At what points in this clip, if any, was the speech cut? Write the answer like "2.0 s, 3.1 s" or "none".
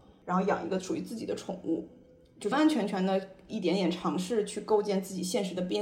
2.5 s

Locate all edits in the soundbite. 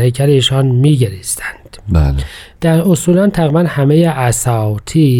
2.6 s

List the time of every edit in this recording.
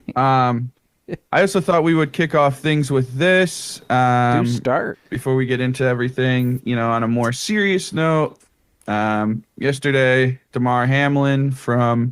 4.9 s, 10.5 s

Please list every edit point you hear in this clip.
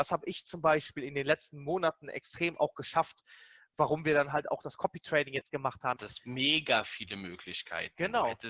3.7 s, 6.0 s

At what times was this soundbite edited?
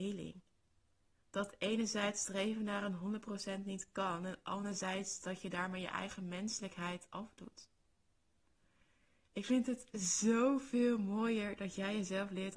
none

